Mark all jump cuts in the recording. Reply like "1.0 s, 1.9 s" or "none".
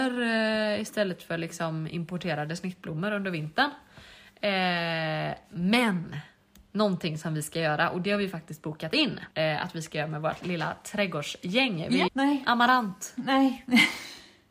9.3 s, 10.4 s, 12.1 s